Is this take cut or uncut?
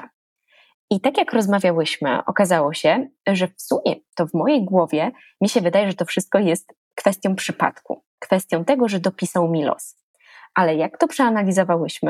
uncut